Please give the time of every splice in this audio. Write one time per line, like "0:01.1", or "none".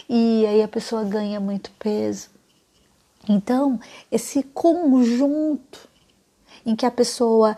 none